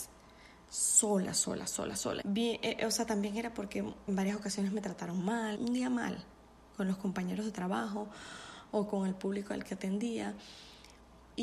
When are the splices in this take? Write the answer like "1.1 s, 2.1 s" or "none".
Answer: 2.2 s, 4.1 s, 5.6 s